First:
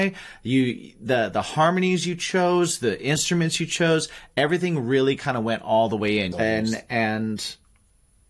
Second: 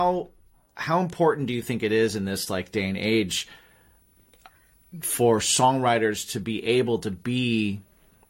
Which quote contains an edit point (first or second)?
first